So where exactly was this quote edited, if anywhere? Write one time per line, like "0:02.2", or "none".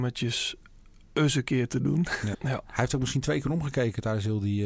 0:02.3